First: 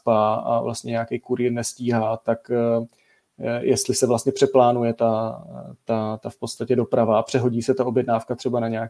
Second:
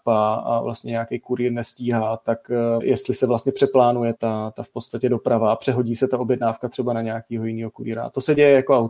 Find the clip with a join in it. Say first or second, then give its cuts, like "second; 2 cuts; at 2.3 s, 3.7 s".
second; 2 cuts; at 2.8 s, 4.2 s